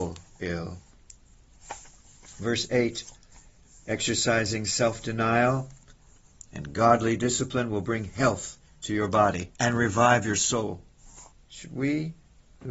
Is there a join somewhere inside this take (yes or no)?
yes